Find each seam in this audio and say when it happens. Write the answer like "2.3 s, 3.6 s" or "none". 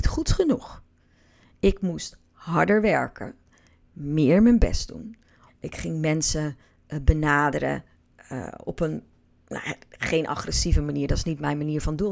5.5 s